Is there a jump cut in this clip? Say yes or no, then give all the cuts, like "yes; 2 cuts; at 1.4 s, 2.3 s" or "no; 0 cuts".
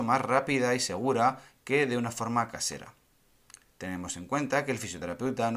no; 0 cuts